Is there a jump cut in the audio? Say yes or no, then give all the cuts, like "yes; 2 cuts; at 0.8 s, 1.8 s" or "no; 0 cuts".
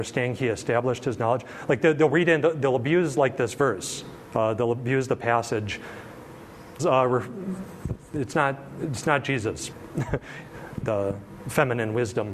yes; 3 cuts; at 6.8 s, 9.7 s, 10.8 s